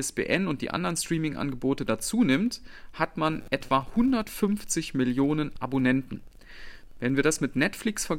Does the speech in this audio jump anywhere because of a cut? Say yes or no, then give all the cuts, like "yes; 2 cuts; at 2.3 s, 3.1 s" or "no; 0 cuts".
no; 0 cuts